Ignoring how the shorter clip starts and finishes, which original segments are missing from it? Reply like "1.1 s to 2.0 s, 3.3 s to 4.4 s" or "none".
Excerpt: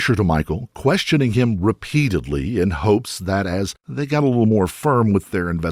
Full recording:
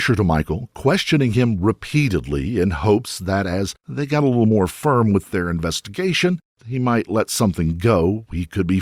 none

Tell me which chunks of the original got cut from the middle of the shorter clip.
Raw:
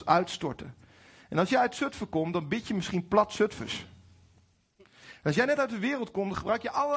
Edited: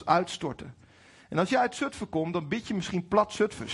none

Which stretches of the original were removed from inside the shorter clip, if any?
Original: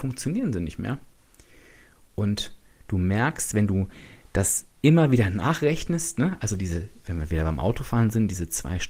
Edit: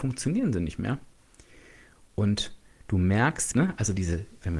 3.5 s to 6.1 s

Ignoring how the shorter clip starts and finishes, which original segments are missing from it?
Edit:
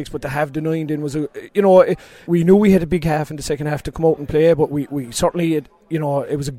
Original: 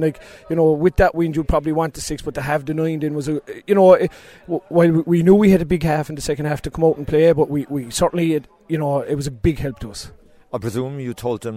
4.4 s to 5.0 s

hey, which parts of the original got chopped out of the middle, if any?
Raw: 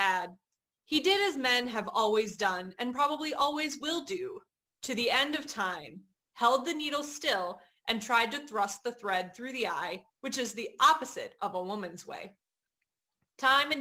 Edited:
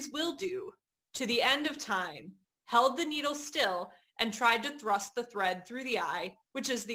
none

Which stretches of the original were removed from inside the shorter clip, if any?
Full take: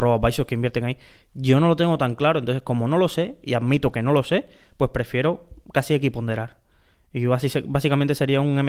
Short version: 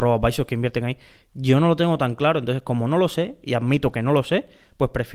none

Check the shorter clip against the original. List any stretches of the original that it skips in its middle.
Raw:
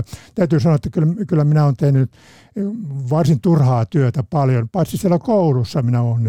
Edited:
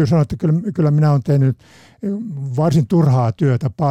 none

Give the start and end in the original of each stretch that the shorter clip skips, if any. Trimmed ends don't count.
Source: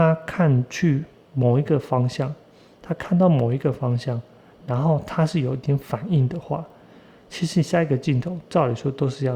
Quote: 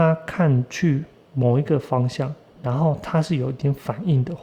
2.5 s to 4.5 s

